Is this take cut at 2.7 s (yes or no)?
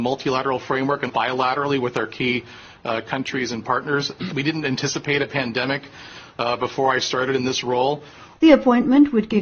no